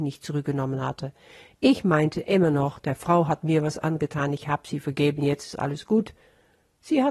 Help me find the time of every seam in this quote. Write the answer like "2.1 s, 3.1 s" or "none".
none